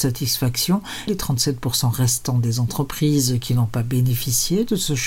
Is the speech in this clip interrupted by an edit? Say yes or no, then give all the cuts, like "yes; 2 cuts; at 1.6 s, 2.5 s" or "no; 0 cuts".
yes; 1 cut; at 1.1 s